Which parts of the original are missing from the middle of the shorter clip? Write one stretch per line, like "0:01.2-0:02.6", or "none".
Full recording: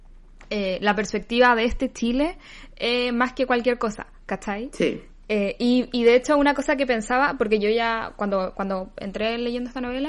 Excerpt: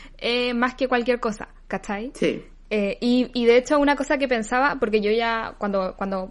none